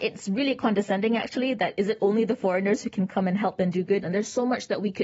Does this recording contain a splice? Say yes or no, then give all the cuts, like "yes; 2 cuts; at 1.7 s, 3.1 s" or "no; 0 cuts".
yes; 1 cut; at 4.0 s